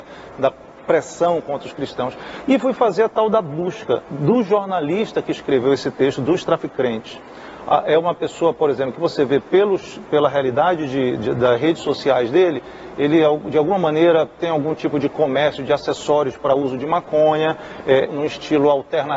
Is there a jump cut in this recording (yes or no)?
yes